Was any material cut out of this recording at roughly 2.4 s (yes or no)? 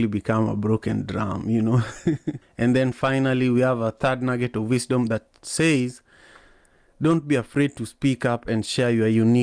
yes